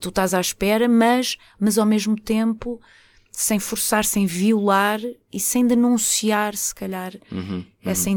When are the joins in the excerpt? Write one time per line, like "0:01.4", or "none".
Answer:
0:05.2